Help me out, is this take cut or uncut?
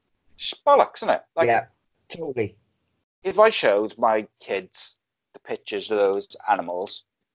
cut